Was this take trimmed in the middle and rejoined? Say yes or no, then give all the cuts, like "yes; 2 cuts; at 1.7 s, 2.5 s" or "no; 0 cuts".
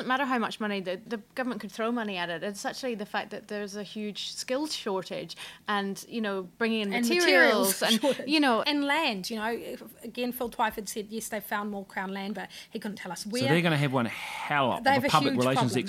yes; 2 cuts; at 1.1 s, 8.6 s